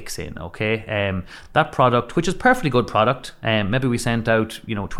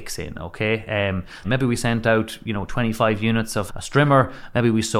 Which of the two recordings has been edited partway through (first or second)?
second